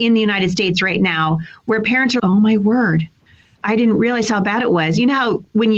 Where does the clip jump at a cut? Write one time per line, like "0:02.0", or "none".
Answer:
0:02.2